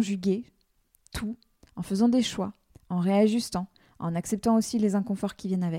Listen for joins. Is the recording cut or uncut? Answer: uncut